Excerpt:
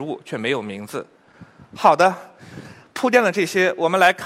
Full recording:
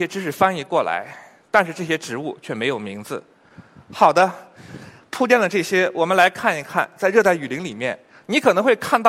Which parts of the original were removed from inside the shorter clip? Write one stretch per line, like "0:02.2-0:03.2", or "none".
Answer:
none